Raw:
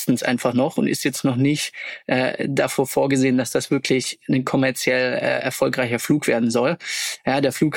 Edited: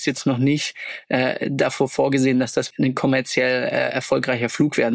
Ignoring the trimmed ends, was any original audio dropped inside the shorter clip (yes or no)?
yes